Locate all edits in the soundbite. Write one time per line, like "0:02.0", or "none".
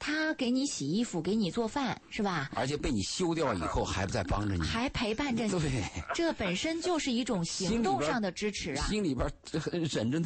none